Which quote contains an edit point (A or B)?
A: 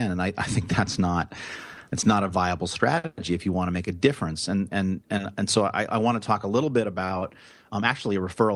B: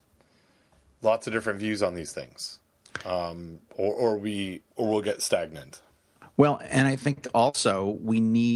B